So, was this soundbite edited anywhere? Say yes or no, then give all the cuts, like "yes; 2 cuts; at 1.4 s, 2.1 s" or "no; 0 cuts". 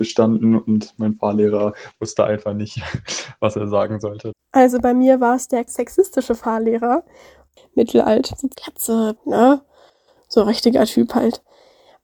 yes; 2 cuts; at 4.3 s, 9.2 s